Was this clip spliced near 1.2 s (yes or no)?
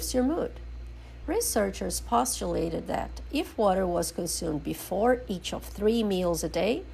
yes